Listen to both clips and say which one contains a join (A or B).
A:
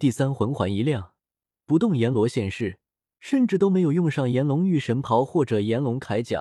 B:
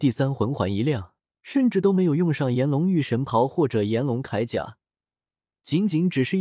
B